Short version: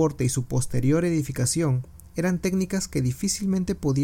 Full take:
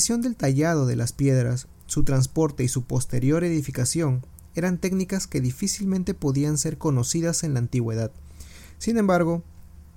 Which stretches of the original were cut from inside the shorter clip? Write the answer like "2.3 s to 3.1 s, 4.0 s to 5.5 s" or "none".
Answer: none